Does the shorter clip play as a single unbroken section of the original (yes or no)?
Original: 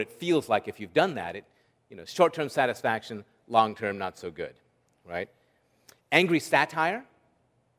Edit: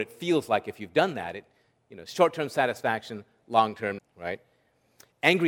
no